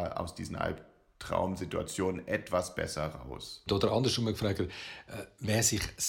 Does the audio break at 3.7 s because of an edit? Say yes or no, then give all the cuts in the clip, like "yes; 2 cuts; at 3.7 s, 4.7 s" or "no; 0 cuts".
yes; 1 cut; at 3.7 s